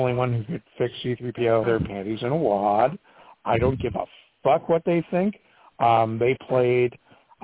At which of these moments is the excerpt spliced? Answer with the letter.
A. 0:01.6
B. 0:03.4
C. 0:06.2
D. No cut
A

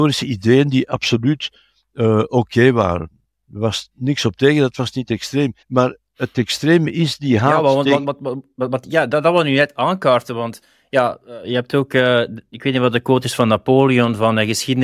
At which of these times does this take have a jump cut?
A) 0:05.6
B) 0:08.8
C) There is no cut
A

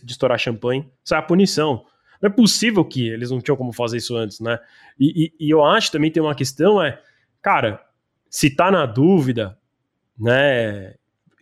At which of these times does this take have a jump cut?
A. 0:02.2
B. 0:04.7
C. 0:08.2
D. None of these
D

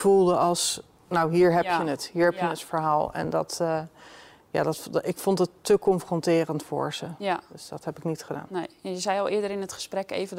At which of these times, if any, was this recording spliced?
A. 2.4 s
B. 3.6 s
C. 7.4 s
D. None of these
D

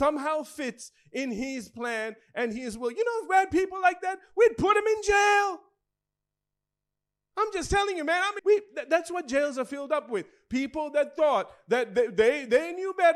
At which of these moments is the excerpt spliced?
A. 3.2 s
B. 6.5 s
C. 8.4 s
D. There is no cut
C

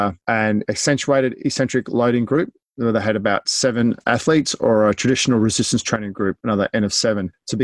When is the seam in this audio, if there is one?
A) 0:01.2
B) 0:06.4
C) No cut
C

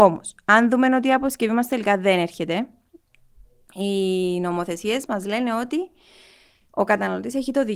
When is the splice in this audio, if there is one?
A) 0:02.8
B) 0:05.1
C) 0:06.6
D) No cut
B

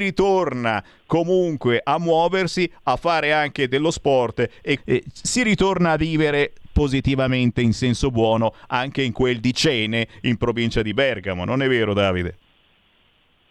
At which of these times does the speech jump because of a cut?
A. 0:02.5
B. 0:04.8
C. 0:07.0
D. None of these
B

